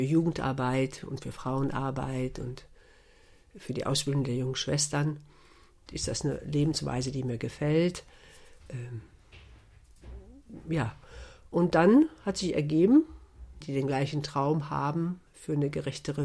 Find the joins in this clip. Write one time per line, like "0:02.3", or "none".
0:05.9
0:13.6
0:15.3